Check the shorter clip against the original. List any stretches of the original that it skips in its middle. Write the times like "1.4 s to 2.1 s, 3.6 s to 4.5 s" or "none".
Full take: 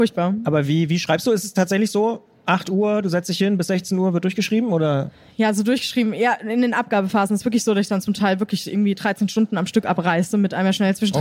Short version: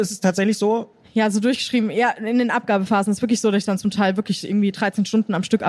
2.4 s to 5.3 s